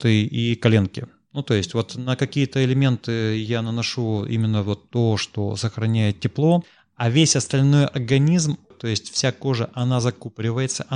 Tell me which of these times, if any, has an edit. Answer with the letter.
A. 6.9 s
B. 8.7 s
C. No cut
B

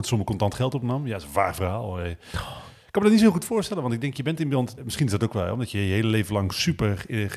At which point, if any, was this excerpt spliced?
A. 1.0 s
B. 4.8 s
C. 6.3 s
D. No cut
B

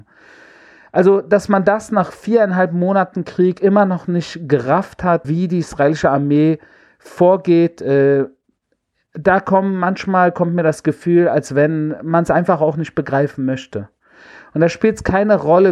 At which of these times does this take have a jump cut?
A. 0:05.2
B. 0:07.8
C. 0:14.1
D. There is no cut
A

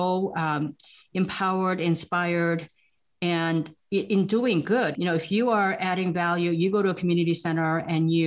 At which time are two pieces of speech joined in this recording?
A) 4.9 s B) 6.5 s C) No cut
A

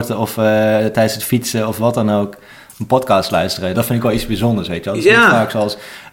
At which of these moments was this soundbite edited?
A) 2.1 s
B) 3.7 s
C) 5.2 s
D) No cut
B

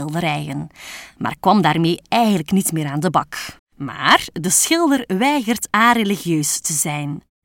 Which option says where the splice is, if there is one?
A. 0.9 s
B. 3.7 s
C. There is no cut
B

